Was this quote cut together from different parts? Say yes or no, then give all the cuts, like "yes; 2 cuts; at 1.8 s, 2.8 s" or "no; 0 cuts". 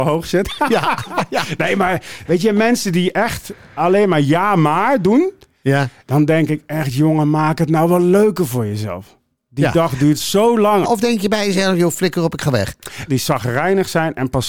yes; 2 cuts; at 10.8 s, 13.1 s